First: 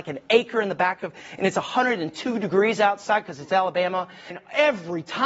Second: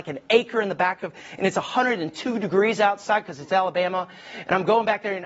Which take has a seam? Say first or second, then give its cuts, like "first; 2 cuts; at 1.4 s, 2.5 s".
first; 1 cut; at 4.3 s